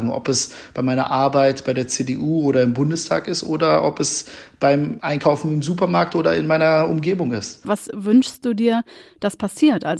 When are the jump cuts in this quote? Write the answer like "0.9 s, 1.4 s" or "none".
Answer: 7.6 s